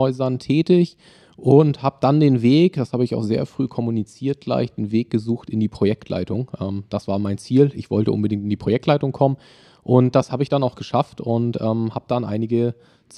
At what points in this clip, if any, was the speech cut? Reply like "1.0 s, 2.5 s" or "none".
none